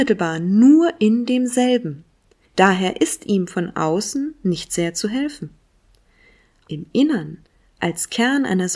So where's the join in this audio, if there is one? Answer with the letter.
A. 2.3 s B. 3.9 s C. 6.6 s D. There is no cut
C